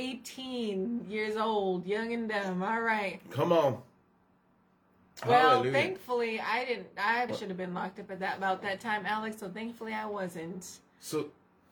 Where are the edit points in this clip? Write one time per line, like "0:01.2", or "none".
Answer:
0:07.3